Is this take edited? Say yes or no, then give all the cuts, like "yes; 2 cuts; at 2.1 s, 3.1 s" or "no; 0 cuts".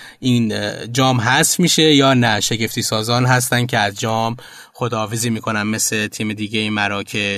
no; 0 cuts